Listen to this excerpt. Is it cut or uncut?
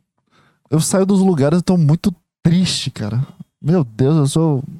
uncut